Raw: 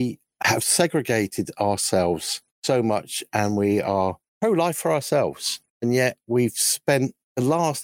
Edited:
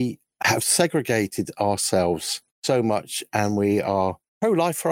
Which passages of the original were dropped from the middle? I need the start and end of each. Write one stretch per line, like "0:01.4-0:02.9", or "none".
none